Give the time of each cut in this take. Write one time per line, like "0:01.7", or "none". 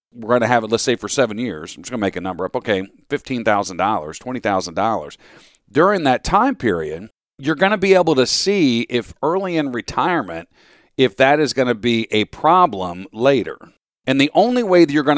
none